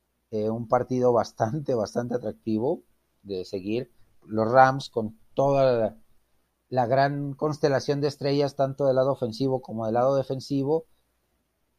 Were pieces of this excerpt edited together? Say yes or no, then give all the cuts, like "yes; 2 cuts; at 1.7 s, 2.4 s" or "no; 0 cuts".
no; 0 cuts